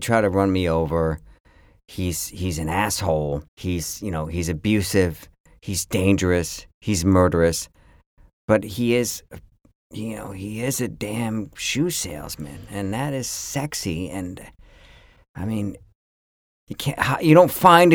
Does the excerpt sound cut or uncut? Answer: cut